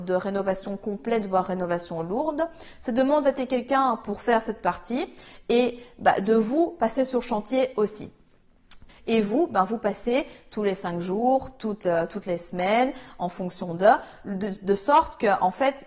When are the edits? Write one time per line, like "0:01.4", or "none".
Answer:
0:08.9

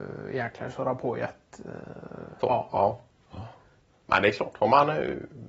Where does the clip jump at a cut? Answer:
0:02.4

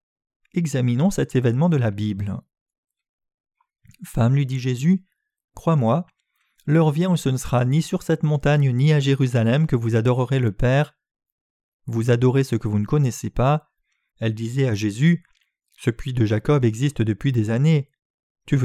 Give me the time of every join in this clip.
0:14.1

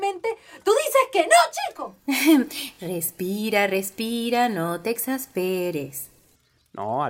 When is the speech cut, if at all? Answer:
none

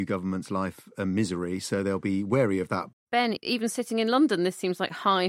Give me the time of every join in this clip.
0:02.9

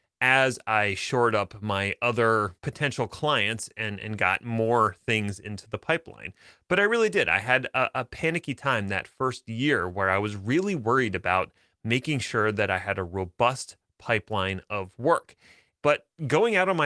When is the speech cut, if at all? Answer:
0:02.6
0:15.7

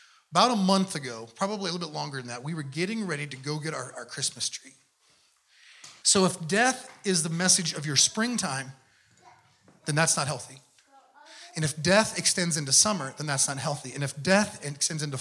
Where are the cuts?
0:06.0

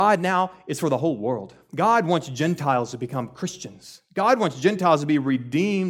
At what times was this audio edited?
none

